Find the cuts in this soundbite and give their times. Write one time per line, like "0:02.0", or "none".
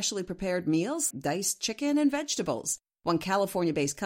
0:01.1